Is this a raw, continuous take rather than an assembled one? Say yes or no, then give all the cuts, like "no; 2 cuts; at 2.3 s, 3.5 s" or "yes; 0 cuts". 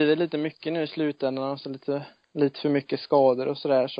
yes; 0 cuts